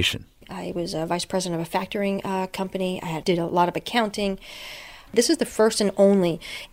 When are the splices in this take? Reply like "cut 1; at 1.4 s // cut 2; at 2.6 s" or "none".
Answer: cut 1; at 3.2 s // cut 2; at 5.1 s